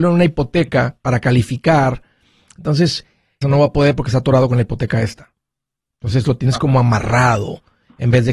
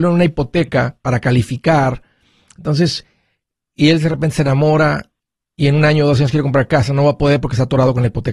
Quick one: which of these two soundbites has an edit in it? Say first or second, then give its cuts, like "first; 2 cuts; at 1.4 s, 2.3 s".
first; 1 cut; at 3.4 s